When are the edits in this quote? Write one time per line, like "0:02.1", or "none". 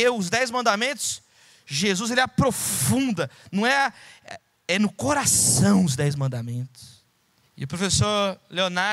0:07.4